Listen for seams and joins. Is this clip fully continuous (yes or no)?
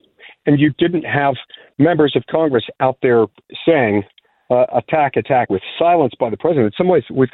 no